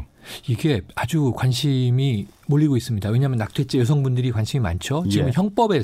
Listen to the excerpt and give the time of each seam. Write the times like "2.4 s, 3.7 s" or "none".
none